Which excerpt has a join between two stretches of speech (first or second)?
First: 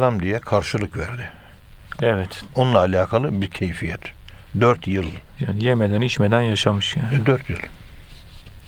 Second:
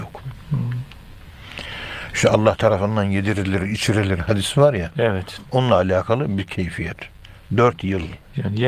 first